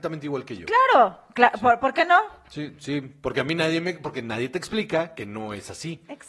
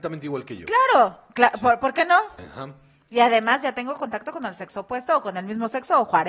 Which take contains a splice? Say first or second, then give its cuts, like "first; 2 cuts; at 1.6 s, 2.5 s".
second; 1 cut; at 2.4 s